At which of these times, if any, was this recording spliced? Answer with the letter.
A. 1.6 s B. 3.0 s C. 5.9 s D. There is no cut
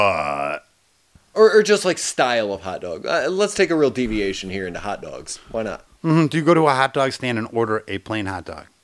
C